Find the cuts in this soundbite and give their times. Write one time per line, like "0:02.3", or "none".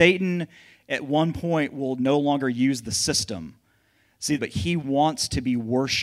0:04.4